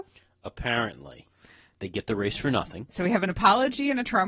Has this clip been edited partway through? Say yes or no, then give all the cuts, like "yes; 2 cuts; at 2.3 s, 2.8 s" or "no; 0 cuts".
yes; 2 cuts; at 1.7 s, 2.9 s